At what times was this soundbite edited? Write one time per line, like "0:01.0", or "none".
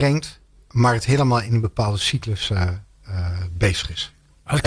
none